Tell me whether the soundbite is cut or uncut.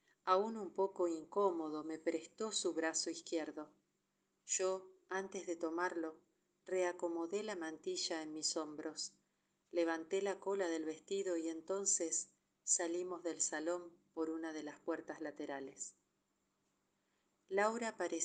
uncut